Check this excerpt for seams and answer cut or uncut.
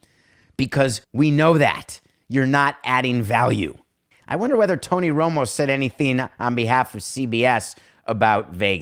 cut